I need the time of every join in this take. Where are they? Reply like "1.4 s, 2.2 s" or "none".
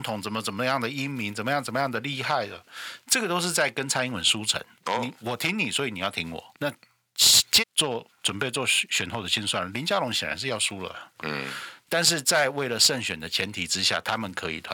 6.5 s, 7.6 s, 11.1 s